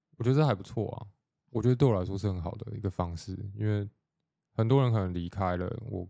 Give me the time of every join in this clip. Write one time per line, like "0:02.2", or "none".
none